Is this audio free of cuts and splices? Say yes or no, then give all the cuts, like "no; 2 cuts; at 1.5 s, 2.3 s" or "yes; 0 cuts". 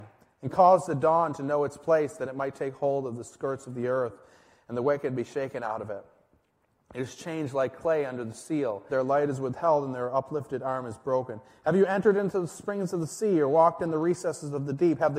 no; 1 cut; at 8.9 s